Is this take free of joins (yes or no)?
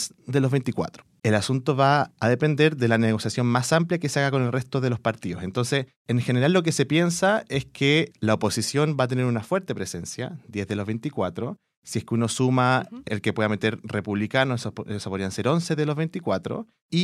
no